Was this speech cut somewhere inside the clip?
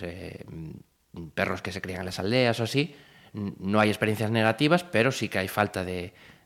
no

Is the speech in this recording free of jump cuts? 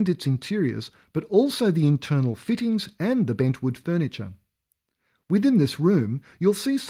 yes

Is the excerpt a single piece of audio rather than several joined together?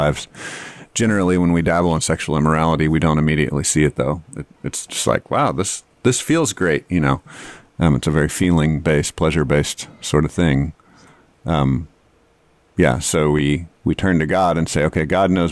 yes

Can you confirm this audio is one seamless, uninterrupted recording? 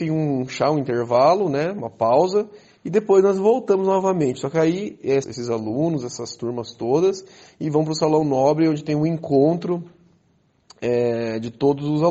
no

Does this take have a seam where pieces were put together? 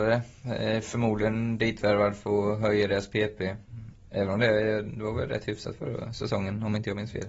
no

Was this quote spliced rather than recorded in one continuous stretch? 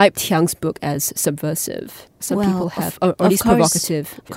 no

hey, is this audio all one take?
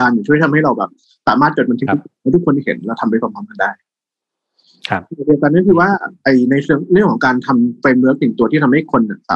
yes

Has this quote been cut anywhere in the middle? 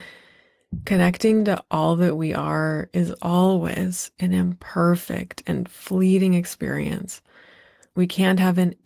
yes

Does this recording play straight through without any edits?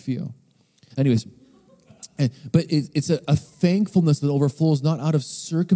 no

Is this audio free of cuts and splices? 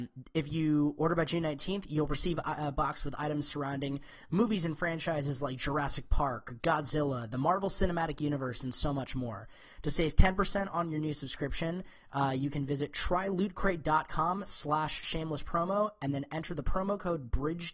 no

